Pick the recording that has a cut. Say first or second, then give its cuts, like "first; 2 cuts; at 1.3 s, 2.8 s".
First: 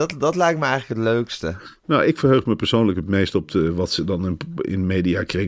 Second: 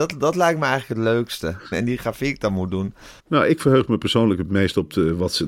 second; 2 cuts; at 1.7 s, 3.2 s